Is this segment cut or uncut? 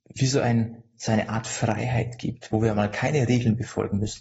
uncut